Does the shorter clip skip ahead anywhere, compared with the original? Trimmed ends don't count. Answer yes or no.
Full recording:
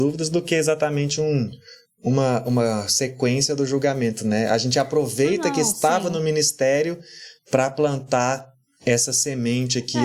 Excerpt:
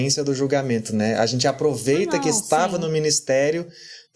no